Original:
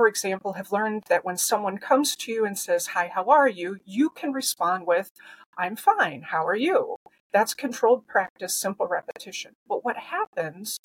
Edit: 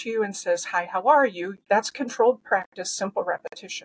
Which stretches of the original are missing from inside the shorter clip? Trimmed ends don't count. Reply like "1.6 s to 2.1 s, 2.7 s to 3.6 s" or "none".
3.8 s to 7.2 s